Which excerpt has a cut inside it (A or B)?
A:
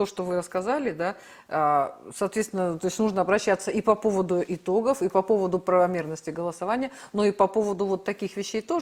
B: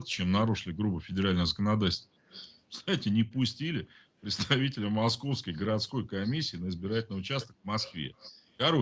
B